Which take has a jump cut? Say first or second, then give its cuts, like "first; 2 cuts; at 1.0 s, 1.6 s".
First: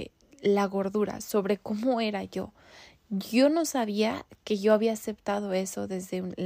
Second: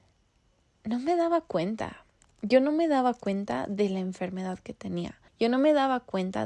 second; 1 cut; at 5.3 s